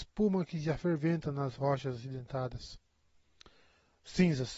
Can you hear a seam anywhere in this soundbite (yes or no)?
no